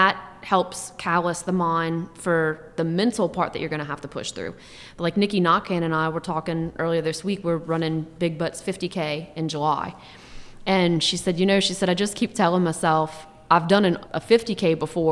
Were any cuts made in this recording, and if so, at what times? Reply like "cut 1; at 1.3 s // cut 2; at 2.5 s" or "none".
none